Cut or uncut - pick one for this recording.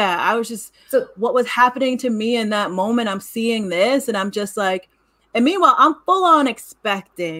uncut